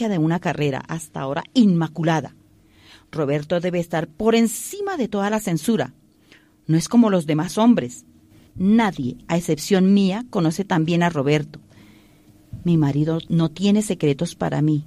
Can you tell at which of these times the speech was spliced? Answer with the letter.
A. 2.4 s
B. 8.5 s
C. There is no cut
B